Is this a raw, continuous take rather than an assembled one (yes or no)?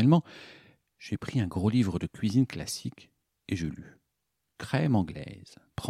yes